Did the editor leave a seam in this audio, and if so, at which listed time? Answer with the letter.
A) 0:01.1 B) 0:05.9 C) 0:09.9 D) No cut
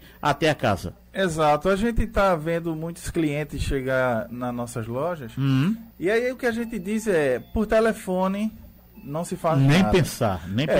B